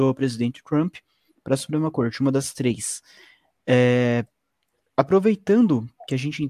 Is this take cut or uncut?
uncut